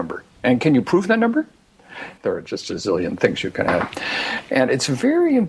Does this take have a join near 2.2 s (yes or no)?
yes